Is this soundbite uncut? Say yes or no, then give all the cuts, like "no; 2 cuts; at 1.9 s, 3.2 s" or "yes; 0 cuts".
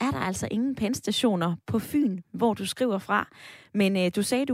yes; 0 cuts